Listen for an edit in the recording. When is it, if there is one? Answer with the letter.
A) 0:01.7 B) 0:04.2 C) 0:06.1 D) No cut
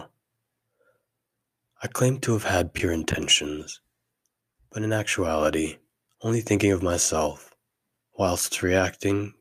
C